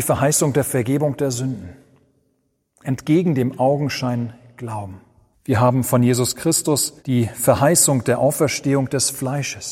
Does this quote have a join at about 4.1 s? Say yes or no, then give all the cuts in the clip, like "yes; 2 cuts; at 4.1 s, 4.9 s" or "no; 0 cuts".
no; 3 cuts; at 2.8 s, 5.3 s, 7.0 s